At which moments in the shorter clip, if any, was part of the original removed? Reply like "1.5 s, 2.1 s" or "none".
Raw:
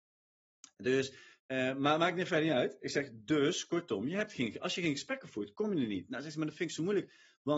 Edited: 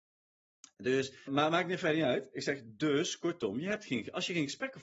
1.3 s